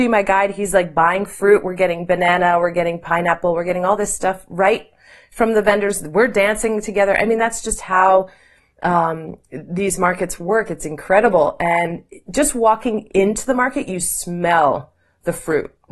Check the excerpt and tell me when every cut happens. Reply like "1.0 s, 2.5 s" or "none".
none